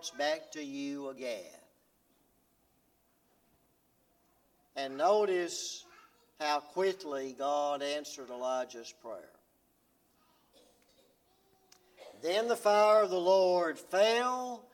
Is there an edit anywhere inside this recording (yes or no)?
no